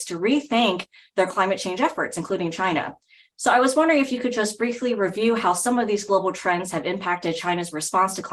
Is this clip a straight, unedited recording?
yes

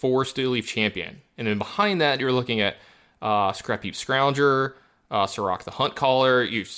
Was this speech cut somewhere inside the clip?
no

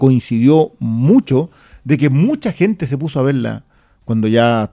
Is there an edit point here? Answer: no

